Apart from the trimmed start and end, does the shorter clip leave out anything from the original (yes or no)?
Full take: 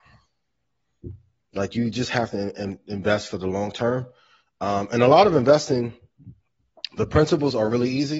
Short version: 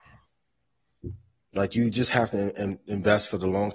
no